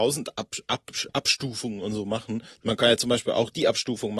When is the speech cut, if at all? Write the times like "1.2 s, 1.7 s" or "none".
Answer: none